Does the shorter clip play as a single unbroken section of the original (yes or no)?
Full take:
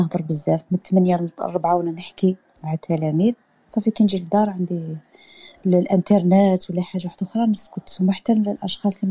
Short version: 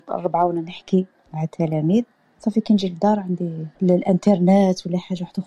no